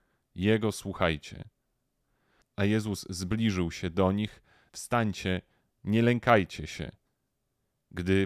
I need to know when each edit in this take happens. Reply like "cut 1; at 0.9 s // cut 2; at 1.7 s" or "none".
cut 1; at 2.4 s // cut 2; at 4.7 s